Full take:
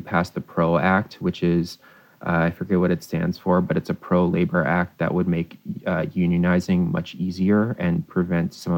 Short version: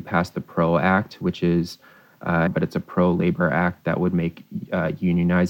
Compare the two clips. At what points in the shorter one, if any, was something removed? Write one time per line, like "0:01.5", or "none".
0:02.5